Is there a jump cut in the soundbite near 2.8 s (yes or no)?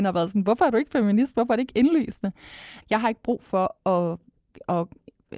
yes